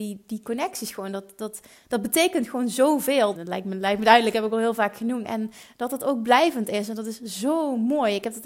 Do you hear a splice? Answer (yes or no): yes